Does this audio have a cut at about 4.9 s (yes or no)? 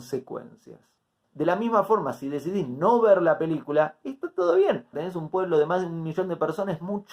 yes